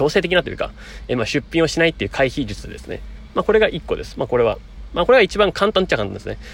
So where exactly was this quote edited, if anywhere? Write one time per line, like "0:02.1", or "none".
none